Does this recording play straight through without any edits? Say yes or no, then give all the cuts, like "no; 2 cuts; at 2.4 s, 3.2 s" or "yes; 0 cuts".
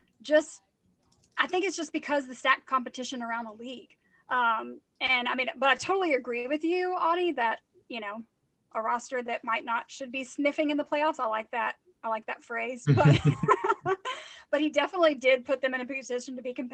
yes; 0 cuts